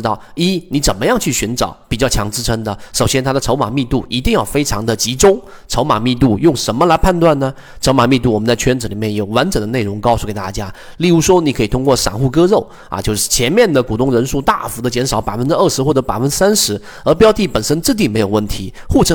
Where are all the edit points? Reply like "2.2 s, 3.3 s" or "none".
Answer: none